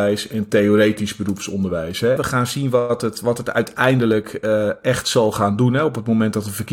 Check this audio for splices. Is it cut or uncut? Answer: cut